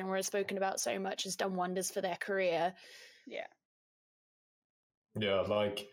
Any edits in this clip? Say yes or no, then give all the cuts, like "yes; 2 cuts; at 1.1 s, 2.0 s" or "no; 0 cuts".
no; 0 cuts